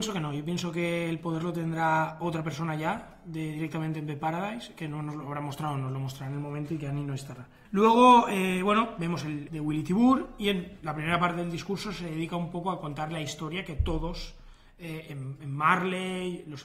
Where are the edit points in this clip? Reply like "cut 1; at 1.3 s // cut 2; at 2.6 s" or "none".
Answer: cut 1; at 7.7 s // cut 2; at 9.5 s